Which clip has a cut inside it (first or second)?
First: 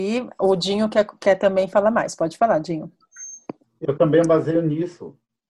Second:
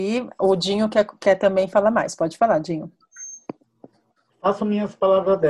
first